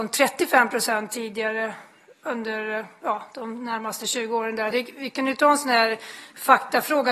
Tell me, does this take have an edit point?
yes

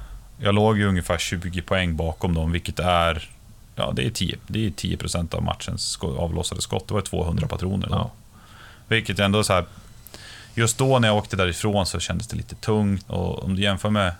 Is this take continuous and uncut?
no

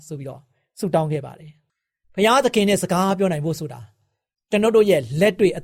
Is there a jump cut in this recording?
no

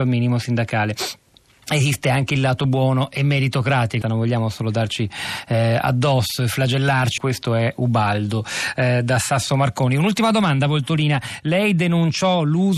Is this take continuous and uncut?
no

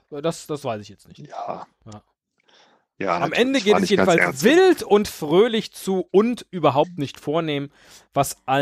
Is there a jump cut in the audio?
no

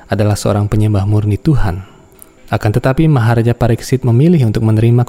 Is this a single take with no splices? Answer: yes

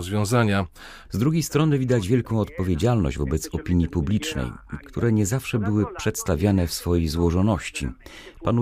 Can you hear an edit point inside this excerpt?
yes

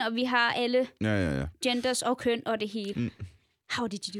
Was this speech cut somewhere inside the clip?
yes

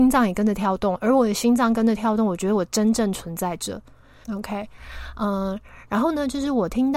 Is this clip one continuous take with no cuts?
no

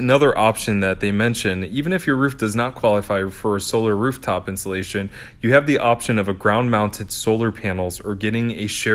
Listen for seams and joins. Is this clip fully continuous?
yes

